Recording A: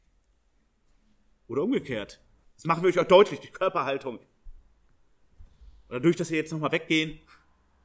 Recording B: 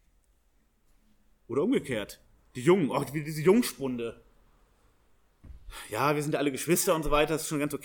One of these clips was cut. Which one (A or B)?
A